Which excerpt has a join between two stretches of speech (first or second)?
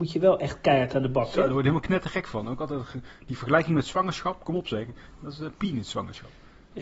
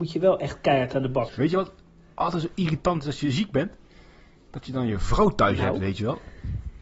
second